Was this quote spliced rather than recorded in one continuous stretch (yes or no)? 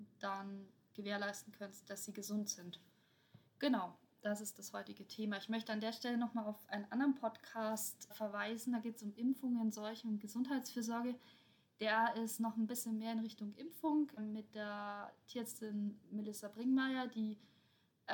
yes